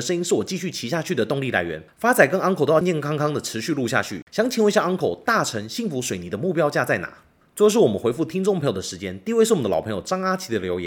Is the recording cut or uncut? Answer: cut